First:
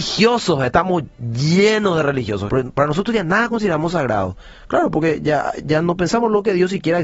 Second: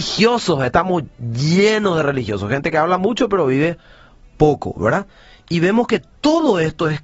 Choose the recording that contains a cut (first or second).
first